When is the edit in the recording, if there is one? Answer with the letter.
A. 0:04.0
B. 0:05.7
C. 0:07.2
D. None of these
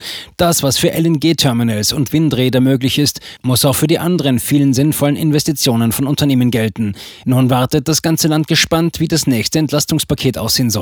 C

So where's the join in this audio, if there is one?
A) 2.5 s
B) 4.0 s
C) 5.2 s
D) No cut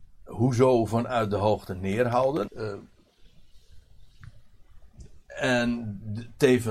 A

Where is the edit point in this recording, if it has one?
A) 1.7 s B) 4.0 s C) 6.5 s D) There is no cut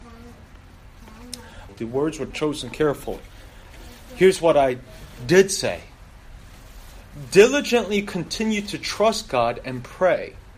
A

